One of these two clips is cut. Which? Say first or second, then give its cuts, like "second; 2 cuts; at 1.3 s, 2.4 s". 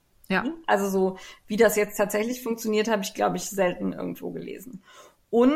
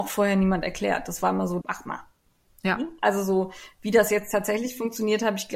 second; 1 cut; at 1.6 s